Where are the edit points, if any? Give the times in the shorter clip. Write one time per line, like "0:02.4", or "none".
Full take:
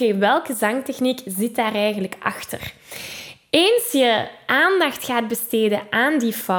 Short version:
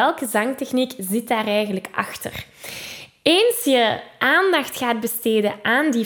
none